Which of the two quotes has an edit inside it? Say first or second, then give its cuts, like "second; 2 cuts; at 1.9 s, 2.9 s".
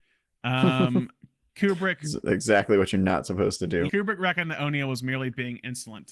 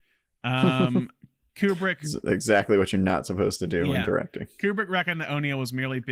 first; 1 cut; at 3.9 s